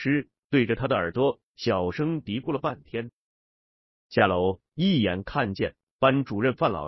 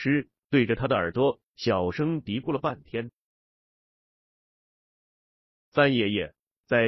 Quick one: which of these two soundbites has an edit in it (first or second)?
first